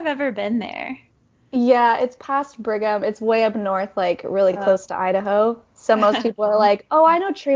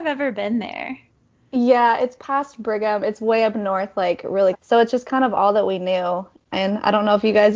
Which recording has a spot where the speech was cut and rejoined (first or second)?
second